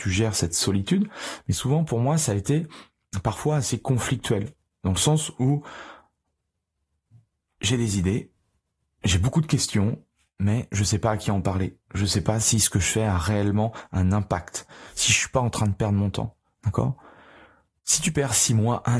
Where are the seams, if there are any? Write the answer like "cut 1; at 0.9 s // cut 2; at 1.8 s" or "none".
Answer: none